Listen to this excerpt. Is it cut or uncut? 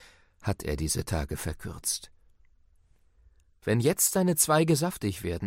cut